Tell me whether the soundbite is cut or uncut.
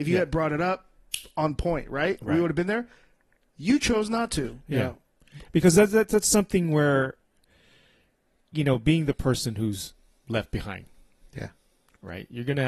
uncut